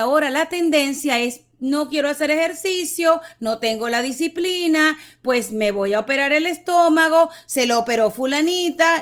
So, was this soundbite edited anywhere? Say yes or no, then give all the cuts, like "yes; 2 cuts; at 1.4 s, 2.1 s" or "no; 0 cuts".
no; 0 cuts